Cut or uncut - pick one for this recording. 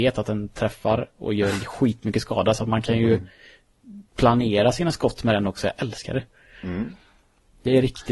uncut